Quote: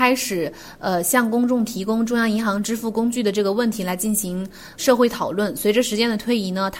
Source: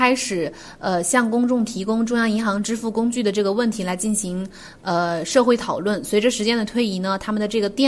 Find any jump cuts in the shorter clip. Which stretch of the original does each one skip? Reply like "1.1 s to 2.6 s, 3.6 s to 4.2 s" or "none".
4.8 s to 5.3 s